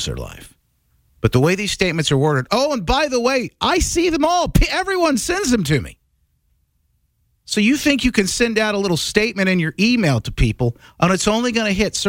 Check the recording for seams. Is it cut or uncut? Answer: uncut